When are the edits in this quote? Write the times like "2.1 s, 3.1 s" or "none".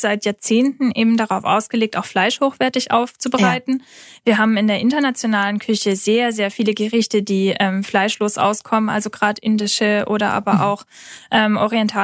none